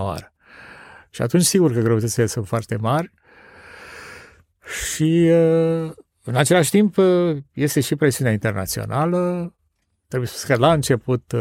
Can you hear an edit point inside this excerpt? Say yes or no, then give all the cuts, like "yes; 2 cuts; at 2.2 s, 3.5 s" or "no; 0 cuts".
no; 0 cuts